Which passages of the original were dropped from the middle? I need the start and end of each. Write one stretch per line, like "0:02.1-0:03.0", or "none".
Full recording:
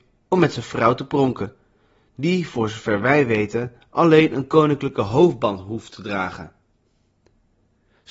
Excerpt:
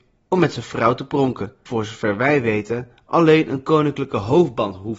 0:01.7-0:02.5